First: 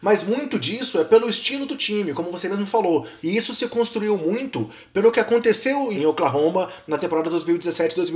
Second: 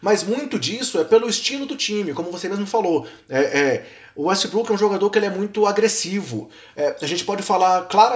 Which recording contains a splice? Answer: first; 2 cuts; at 3.2 s, 5.9 s

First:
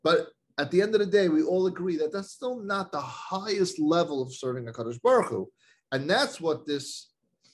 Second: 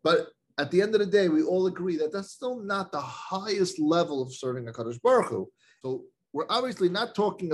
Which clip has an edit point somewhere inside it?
second; 1 cut; at 5.8 s

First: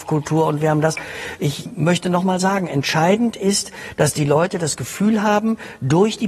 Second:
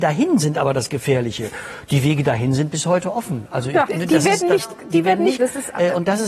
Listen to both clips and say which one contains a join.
second; 2 cuts; at 3.9 s, 5.4 s

